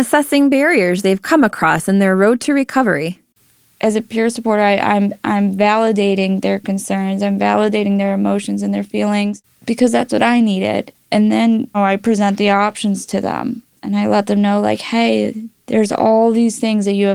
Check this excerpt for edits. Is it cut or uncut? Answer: cut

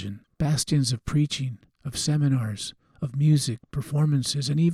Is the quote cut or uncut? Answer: uncut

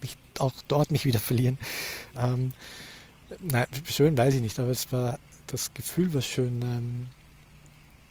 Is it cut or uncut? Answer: cut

